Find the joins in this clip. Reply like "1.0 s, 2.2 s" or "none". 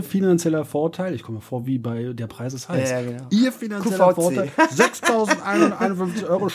none